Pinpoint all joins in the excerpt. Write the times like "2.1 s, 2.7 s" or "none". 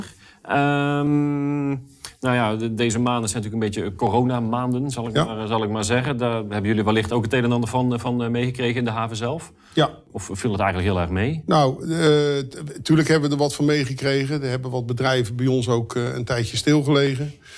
none

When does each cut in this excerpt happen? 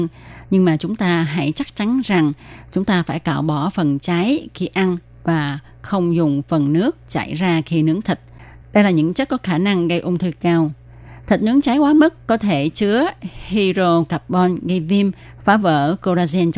8.6 s

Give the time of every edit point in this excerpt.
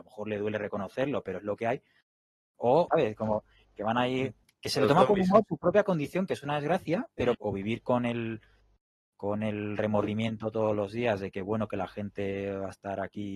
2.9 s, 7.3 s

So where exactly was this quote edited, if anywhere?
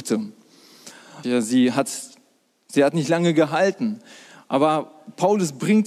1.2 s

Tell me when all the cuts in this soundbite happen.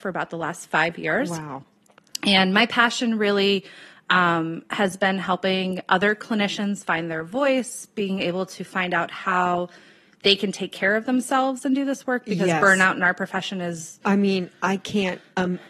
none

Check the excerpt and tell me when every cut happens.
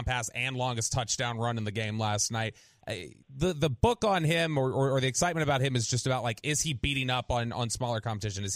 3.2 s

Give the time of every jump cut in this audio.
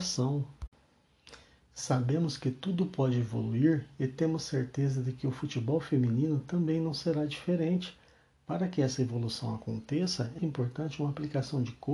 10.4 s

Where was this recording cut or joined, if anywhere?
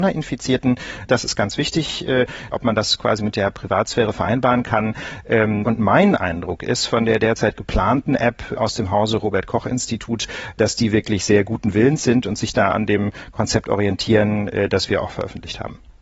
1.1 s, 2.5 s, 5.6 s

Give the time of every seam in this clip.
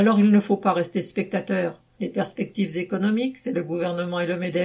1.9 s

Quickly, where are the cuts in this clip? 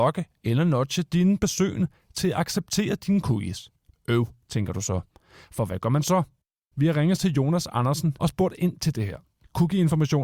3.9 s, 8.2 s

